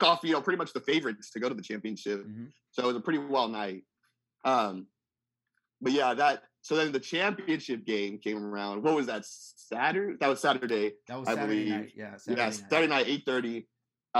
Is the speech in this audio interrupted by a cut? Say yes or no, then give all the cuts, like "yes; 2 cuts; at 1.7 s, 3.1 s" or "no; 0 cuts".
no; 0 cuts